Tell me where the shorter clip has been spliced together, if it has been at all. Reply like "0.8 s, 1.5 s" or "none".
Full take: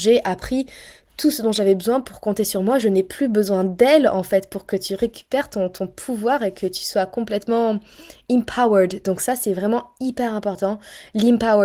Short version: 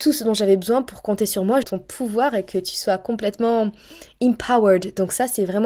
1.6 s